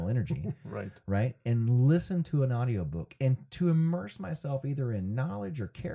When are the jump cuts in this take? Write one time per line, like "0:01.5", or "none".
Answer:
none